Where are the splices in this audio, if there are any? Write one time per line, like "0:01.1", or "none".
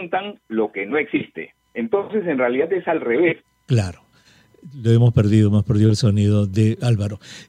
0:01.6
0:03.4